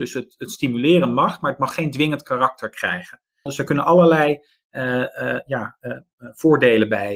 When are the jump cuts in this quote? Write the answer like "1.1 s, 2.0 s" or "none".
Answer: 3.5 s

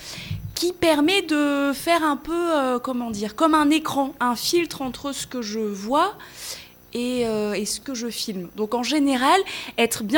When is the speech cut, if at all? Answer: 7.8 s

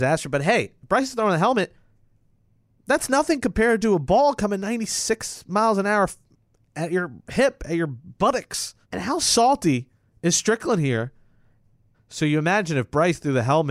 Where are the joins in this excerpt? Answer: 8.8 s, 11.9 s

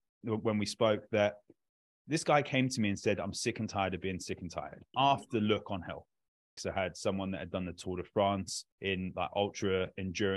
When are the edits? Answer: 4.9 s, 6.6 s, 8.7 s

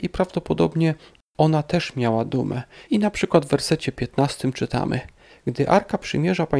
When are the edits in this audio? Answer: 2.8 s, 5.3 s

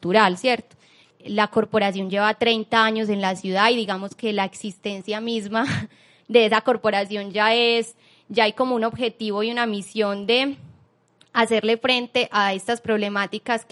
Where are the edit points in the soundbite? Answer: 1.1 s

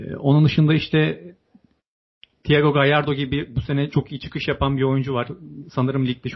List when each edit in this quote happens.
none

